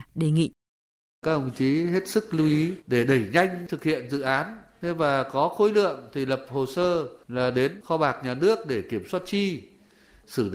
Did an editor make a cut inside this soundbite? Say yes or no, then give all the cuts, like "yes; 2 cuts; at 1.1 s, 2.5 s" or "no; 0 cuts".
no; 0 cuts